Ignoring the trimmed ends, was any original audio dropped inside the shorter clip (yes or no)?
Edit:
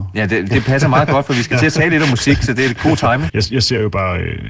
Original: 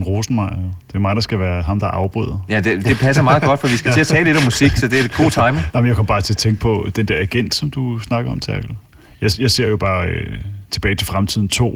yes